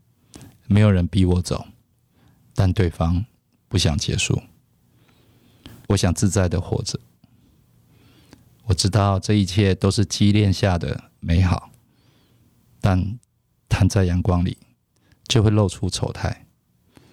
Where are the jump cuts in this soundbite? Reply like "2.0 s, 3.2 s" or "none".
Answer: 5.9 s